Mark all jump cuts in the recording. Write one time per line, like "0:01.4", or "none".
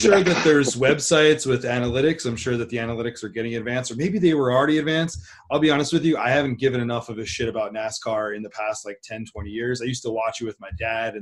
none